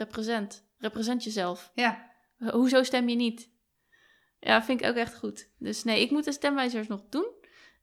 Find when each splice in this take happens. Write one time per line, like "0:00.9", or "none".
none